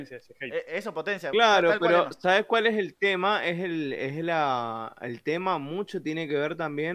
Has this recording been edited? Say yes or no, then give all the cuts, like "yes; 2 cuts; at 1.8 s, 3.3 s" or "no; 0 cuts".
no; 0 cuts